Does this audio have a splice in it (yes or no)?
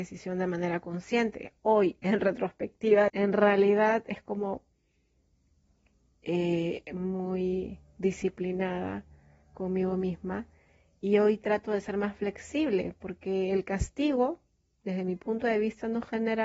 yes